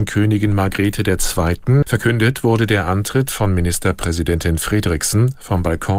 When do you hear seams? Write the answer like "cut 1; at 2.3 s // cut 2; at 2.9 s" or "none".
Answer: cut 1; at 1.8 s

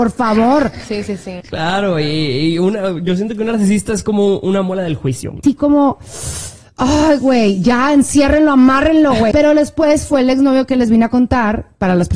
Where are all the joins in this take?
cut 1; at 1.4 s // cut 2; at 5.4 s // cut 3; at 9.3 s

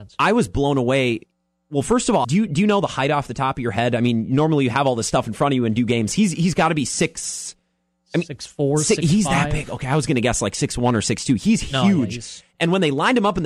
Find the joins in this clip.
cut 1; at 2.2 s

